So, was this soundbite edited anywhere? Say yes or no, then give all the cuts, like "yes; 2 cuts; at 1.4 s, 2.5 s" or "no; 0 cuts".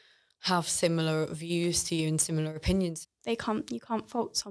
yes; 1 cut; at 3.0 s